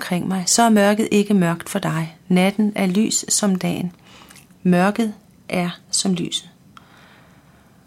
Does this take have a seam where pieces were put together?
no; 0 cuts

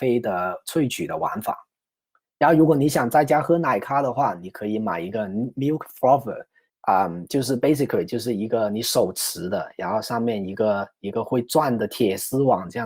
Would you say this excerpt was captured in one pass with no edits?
no; 1 cut; at 6.7 s

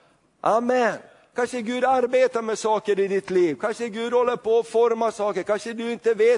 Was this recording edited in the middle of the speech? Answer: no; 0 cuts

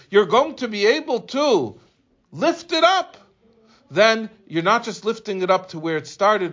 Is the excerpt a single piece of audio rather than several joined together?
yes; 0 cuts

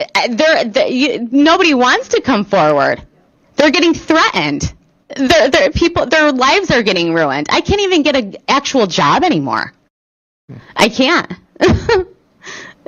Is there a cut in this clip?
no; 0 cuts

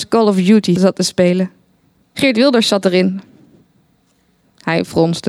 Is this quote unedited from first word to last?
no; 1 cut; at 2.0 s

